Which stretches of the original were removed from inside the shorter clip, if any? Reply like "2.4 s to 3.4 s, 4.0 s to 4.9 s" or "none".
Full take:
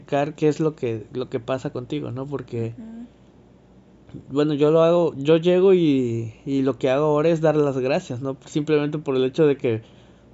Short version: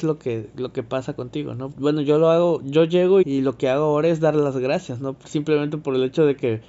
2.3 s to 4.2 s, 5.7 s to 6.4 s